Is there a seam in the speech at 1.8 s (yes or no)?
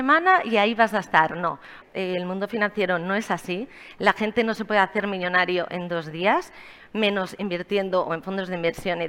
yes